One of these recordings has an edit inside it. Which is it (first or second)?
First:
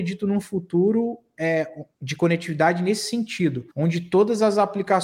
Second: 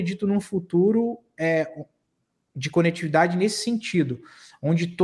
first